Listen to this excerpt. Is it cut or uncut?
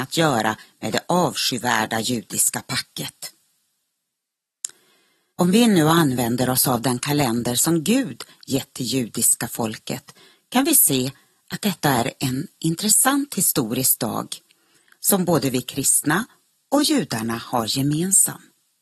cut